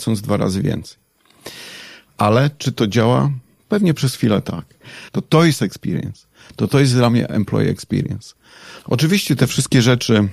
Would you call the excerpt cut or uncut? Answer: cut